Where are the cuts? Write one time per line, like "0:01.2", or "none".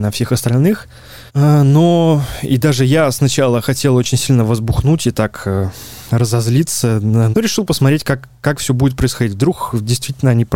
0:01.3
0:07.3